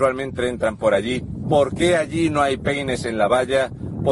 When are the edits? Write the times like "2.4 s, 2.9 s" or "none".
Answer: 1.4 s